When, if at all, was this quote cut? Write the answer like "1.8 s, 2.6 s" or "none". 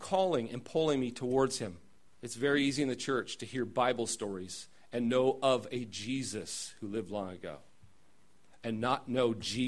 2.0 s